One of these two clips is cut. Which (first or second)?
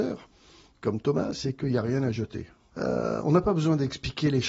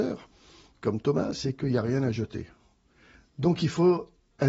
first